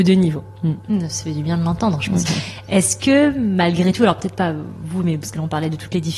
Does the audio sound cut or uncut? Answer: cut